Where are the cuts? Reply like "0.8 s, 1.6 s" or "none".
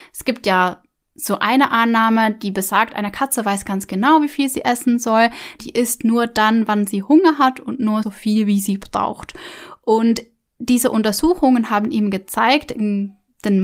5.6 s, 8.0 s